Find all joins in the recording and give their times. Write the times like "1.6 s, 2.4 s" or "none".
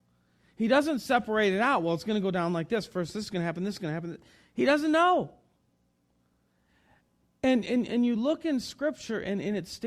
none

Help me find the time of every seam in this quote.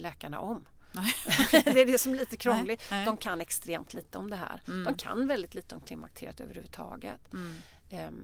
none

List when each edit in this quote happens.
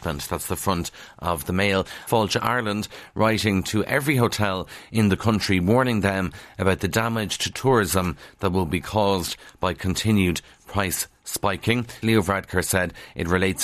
2.1 s, 12.0 s

